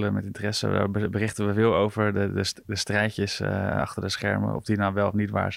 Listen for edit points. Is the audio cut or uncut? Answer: uncut